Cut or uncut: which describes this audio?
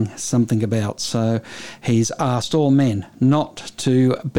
uncut